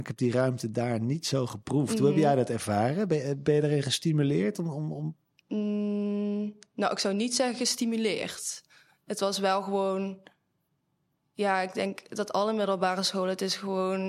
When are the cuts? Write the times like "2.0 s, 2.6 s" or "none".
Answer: none